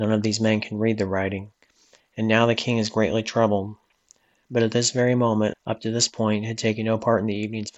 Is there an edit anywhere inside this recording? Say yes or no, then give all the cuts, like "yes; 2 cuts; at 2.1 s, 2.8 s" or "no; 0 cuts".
yes; 1 cut; at 5.5 s